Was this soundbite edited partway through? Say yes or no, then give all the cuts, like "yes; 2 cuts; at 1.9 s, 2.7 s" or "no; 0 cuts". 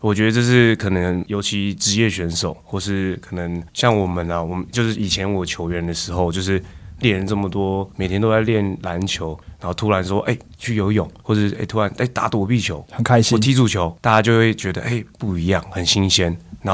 no; 0 cuts